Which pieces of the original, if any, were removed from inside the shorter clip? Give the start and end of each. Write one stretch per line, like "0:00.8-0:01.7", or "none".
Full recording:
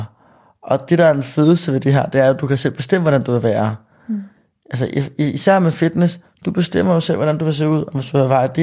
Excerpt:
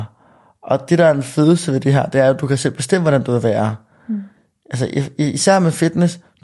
none